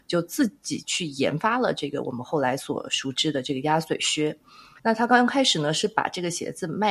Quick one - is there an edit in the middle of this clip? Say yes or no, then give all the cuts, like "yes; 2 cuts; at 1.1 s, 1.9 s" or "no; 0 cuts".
no; 0 cuts